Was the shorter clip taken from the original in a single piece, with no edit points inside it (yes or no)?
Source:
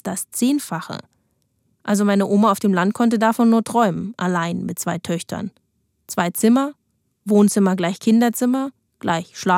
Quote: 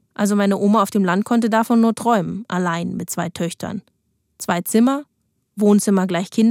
yes